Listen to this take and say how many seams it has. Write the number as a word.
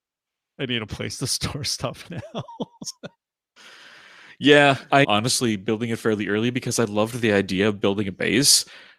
two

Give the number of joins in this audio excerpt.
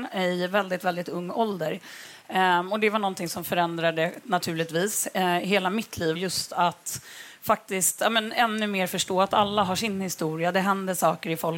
one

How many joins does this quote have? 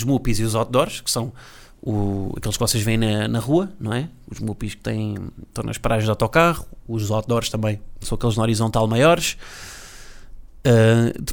zero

